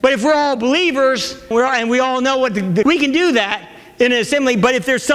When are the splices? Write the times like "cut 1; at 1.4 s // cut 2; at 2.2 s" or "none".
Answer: cut 1; at 1.5 s // cut 2; at 2.8 s